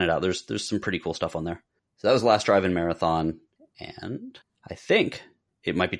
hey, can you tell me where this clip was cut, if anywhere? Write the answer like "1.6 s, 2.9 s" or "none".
none